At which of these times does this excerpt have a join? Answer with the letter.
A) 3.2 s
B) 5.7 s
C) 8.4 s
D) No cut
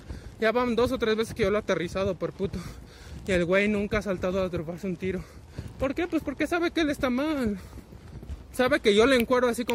D